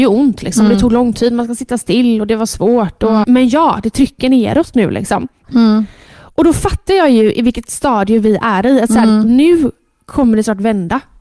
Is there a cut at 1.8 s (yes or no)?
no